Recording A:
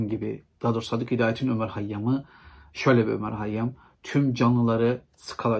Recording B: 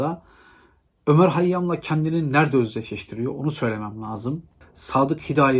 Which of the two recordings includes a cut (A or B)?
B